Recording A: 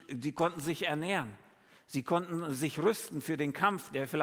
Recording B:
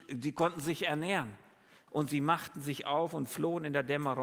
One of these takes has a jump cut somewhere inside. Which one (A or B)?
B